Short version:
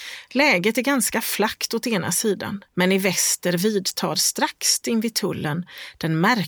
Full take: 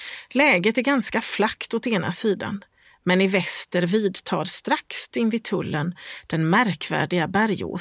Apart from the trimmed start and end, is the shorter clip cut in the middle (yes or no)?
yes